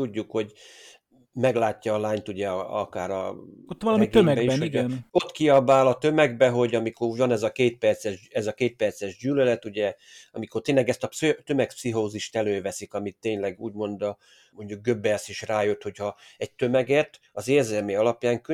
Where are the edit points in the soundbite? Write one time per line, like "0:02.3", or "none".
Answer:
none